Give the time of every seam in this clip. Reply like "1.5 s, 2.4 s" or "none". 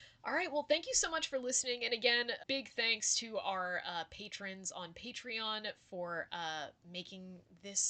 2.4 s